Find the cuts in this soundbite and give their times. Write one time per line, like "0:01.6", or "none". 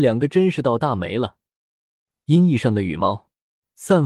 0:02.2

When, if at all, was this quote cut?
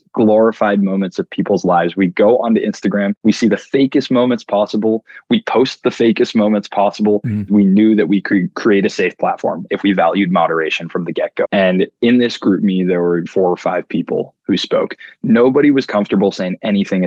0:07.5
0:11.4
0:13.3

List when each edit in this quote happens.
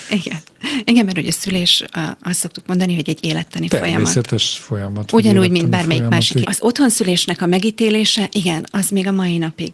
0:06.4

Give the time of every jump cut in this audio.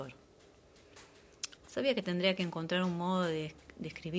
0:01.6

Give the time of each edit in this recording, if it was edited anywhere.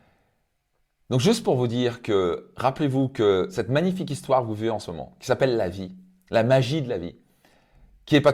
none

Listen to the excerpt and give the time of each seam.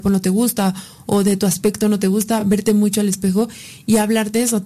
none

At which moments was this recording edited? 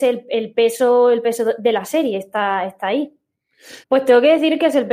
0:03.8

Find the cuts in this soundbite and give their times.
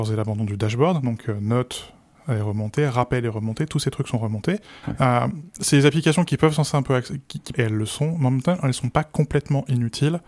0:04.8
0:07.5

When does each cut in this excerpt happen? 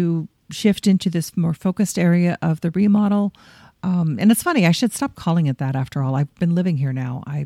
none

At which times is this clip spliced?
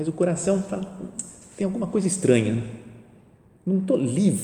none

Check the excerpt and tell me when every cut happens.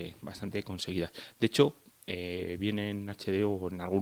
none

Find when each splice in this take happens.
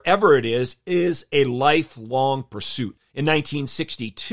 0:03.0

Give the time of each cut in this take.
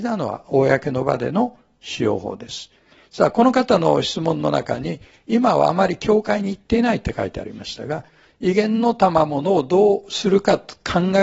0:08.3

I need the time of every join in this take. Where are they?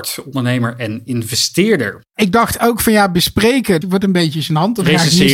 0:03.8

